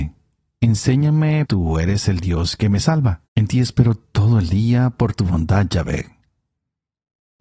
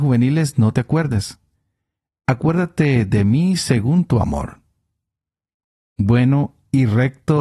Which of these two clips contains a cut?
first; 2 cuts; at 1.5 s, 3.3 s

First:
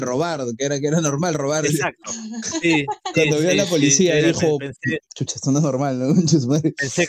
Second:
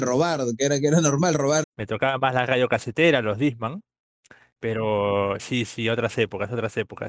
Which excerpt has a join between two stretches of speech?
second; 2 cuts; at 1.6 s, 5.4 s

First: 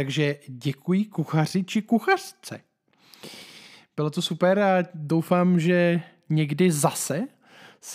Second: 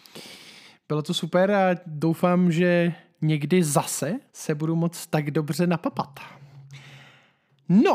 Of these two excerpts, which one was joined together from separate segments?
second; 1 cut; at 4.3 s

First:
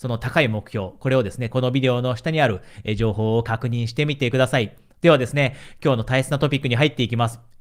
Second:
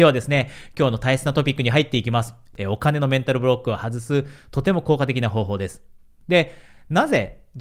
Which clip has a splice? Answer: first; 1 cut; at 1.5 s

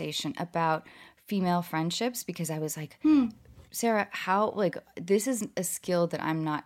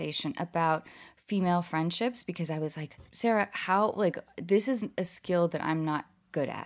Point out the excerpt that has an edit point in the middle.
second; 1 cut; at 3.0 s

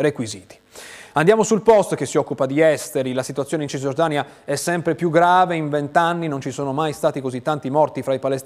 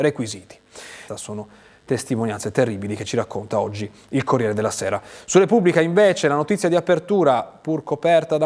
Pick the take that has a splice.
second; 1 cut; at 1.1 s

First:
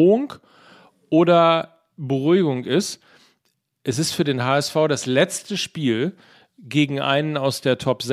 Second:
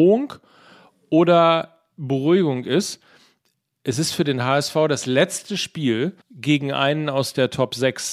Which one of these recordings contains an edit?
second; 1 cut; at 6.2 s

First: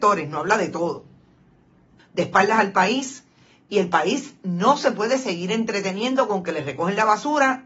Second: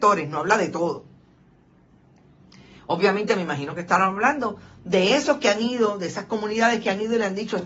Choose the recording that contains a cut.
first; 1 cut; at 2.0 s

